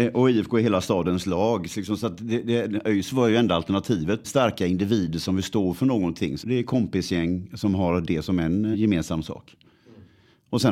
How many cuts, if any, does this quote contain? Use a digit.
3